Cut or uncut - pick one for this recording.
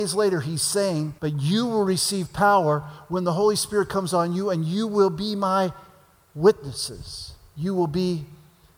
cut